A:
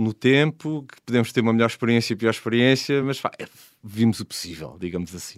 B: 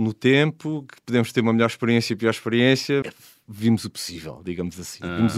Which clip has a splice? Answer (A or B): B